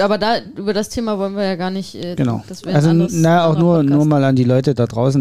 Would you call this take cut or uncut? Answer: cut